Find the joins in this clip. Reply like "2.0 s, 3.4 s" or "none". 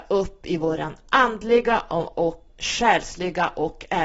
2.5 s